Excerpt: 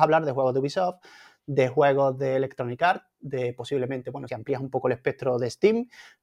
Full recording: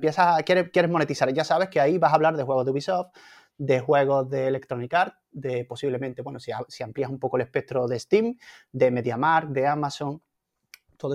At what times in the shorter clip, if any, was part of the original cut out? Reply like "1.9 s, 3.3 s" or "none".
4.3 s